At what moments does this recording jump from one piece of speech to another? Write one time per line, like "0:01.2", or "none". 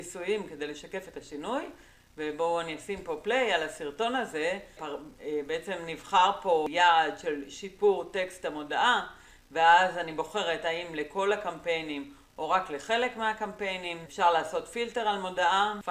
0:04.8
0:14.1